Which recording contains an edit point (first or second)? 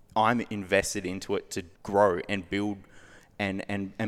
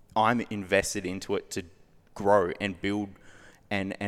first